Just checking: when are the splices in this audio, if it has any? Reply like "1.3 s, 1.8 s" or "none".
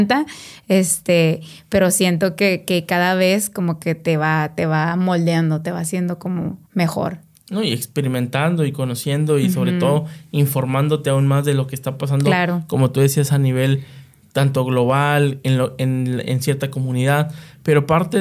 6.6 s